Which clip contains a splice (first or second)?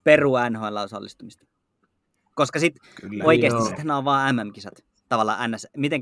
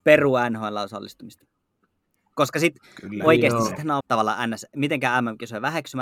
second